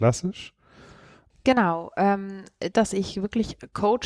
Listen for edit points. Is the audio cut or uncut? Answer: cut